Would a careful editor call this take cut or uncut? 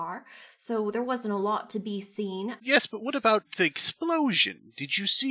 cut